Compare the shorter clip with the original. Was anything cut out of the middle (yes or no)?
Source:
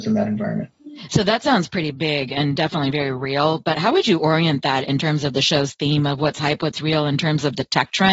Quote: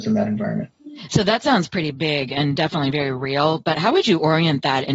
no